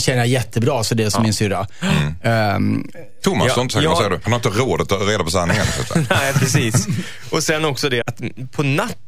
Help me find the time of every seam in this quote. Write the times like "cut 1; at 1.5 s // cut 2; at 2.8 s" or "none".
cut 1; at 4.2 s // cut 2; at 8.0 s